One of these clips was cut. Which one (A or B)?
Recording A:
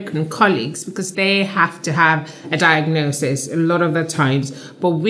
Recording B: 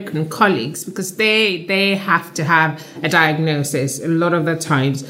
A